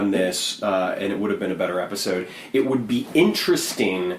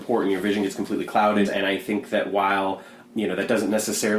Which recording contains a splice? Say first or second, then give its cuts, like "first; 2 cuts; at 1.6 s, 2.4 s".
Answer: second; 2 cuts; at 1.4 s, 3.0 s